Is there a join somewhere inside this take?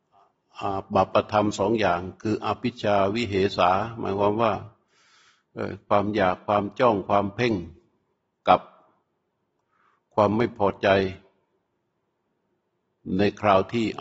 no; 0 cuts

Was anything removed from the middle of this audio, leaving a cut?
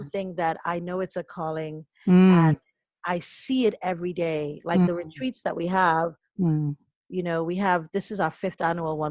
no; 0 cuts

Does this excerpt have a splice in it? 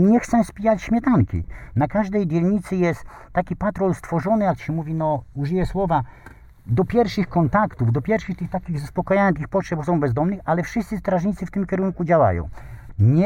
no; 0 cuts

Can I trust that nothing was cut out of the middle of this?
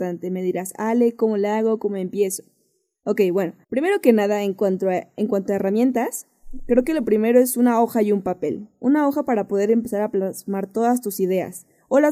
no; 1 cut; at 3.6 s

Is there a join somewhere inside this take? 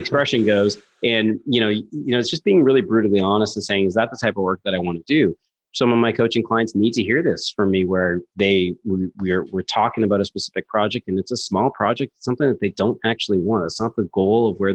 no; 0 cuts

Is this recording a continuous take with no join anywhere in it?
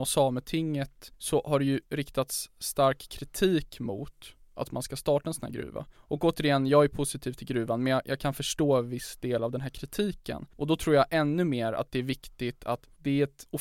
yes; 0 cuts

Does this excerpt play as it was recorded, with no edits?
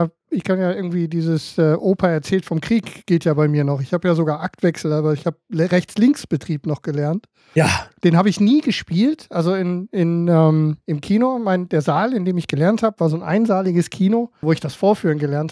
no; 2 cuts; at 10.8 s, 14.4 s

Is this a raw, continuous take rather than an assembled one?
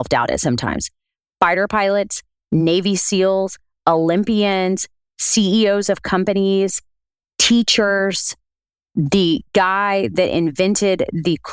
yes; 0 cuts

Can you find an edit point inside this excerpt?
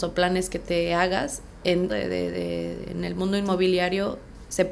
yes; 1 cut; at 1.9 s

